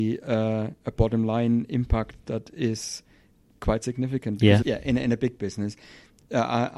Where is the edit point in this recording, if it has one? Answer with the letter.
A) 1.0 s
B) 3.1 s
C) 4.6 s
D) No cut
C